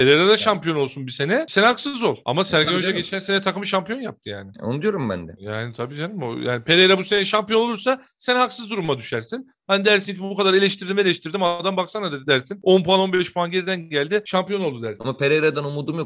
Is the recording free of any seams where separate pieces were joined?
no; 1 cut; at 15.0 s

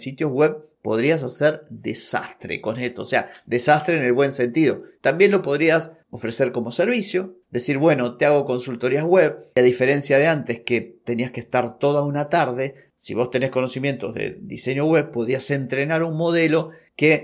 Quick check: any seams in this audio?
no; 0 cuts

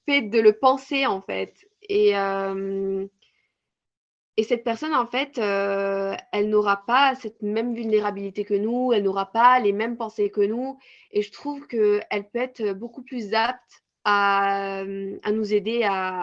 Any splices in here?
no; 0 cuts

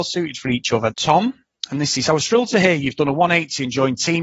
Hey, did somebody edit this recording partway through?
yes; 2 cuts; at 0.9 s, 2.1 s

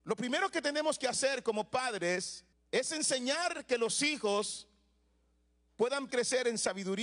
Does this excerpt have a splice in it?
yes; 2 cuts; at 2.5 s, 6.1 s

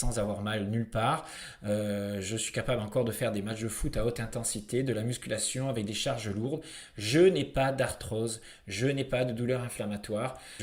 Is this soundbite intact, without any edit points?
yes; 0 cuts

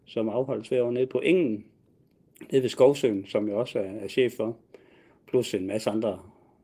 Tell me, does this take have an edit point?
no; 0 cuts

